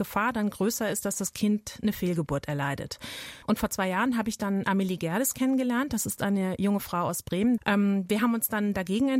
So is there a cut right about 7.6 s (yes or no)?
yes